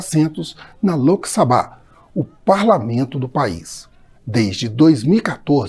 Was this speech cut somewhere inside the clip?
yes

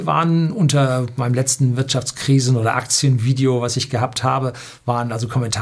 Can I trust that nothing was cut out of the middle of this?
yes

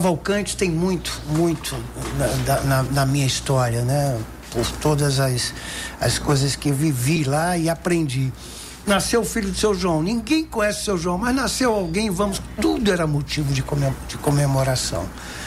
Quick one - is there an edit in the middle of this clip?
yes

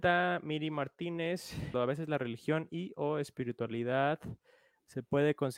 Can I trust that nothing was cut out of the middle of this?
no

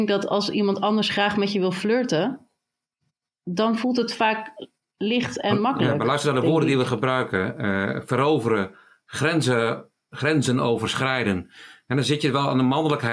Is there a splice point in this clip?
no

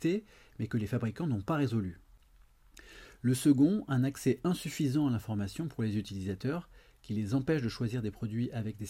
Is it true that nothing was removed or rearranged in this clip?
yes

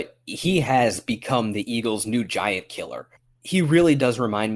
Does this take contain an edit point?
no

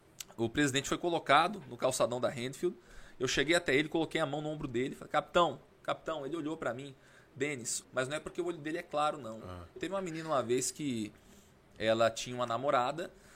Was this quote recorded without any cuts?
no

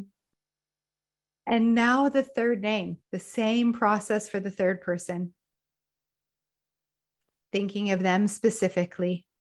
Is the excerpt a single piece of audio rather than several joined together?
no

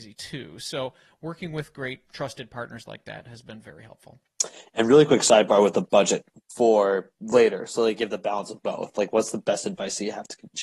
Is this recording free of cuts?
no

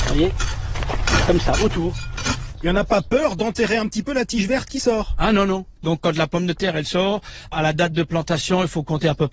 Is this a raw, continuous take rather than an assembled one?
yes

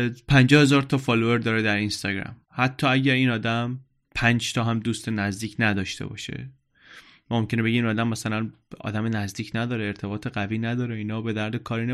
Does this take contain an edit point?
yes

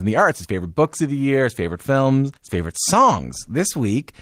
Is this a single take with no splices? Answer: no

